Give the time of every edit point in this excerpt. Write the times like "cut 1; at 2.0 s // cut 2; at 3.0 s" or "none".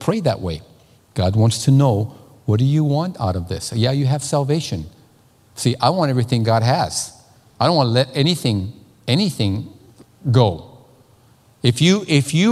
cut 1; at 1.0 s